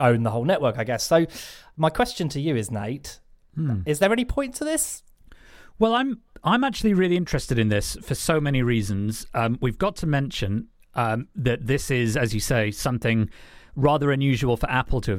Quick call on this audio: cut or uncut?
uncut